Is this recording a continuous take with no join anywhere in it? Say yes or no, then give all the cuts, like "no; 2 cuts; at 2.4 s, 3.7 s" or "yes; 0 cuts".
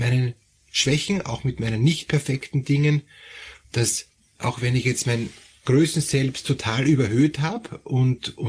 no; 1 cut; at 3.6 s